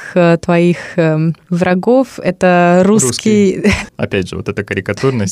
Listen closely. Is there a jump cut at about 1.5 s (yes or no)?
no